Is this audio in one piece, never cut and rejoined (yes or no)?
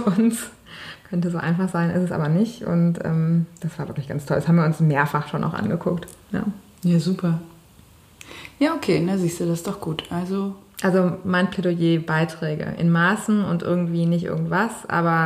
yes